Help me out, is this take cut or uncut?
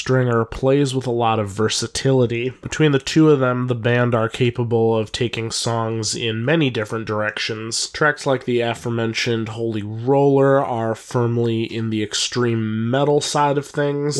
uncut